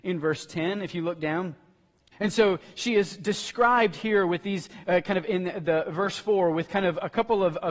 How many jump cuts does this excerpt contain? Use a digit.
1